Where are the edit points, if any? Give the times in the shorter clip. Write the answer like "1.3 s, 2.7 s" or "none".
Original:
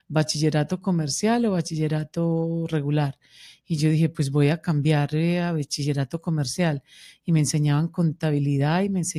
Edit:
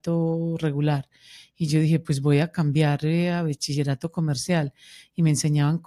none